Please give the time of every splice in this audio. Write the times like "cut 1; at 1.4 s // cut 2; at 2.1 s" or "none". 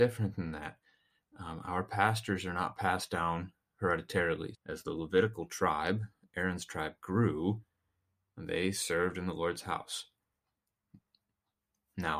cut 1; at 4.5 s